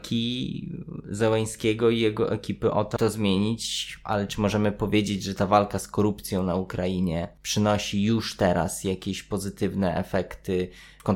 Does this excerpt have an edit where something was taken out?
yes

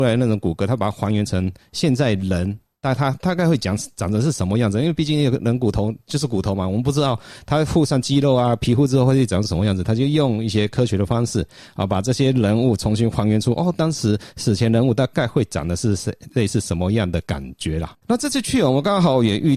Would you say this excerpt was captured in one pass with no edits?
no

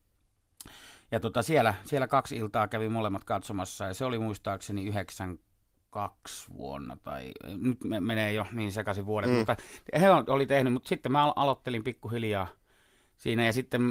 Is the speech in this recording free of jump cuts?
yes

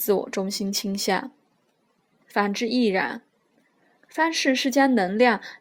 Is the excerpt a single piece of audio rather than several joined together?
no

